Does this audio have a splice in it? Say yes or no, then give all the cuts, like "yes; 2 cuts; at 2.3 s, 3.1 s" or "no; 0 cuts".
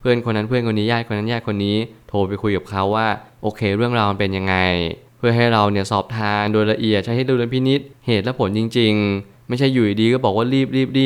no; 0 cuts